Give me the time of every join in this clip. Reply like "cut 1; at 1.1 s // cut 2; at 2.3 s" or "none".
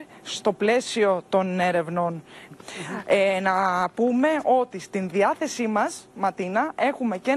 cut 1; at 2.5 s